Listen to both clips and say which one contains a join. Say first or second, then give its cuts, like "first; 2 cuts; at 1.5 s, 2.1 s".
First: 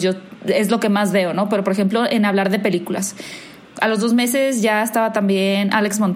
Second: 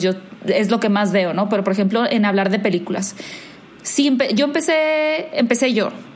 first; 1 cut; at 3.6 s